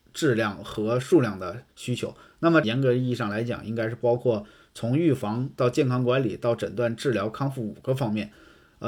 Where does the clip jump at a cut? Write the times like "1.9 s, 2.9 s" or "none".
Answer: 2.6 s